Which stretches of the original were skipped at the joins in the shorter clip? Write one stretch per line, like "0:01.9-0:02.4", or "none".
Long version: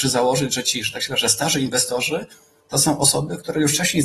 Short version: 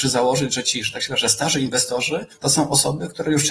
0:02.3-0:02.6

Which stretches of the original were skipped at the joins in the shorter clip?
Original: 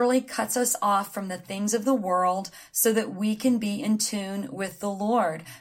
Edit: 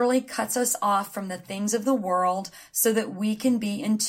none

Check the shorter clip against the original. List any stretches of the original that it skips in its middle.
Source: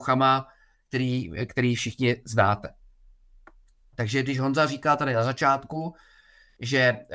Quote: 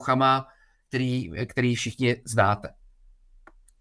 none

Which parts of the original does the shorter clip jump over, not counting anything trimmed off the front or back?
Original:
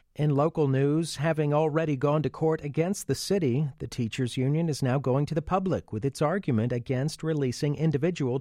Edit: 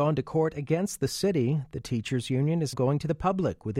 0:04.8-0:05.0

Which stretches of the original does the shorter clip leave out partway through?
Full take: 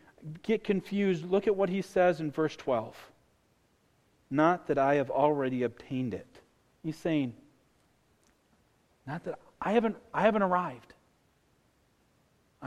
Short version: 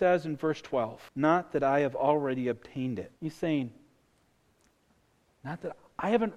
0:03.0-0:04.2
0:06.3-0:06.8

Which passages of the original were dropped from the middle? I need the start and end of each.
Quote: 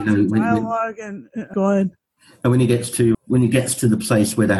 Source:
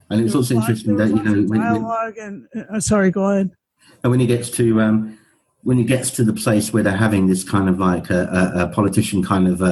0:02.7-0:03.1
0:04.7-0:05.5

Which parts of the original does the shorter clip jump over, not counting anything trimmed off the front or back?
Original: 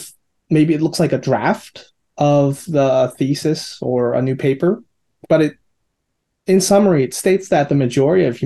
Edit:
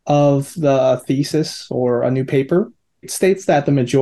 0:05.1-0:07.1

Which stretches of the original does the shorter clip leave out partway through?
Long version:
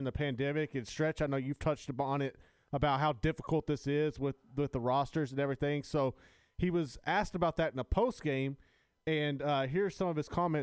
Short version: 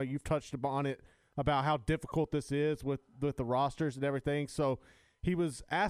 none

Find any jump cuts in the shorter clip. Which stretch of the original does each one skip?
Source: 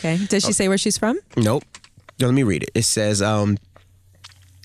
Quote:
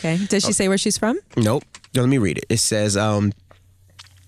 0:01.9-0:02.1

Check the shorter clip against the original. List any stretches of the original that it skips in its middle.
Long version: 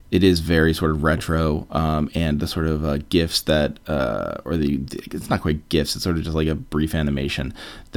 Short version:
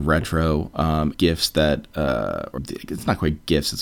0:02.1-0:03.1
0:04.5-0:04.8

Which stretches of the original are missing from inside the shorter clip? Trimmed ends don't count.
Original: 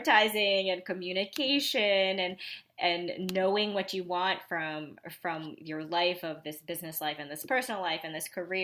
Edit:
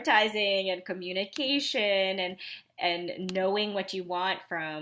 none

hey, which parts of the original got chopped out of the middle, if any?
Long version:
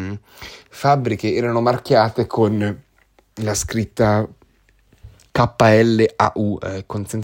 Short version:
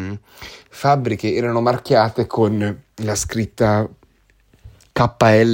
0:02.9-0:03.3

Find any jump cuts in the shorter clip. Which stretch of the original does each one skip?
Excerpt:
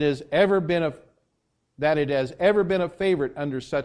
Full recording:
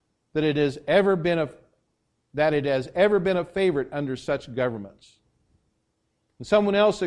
none

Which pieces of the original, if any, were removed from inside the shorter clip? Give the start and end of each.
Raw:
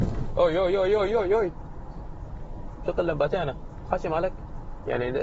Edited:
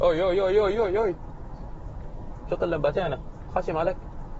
none

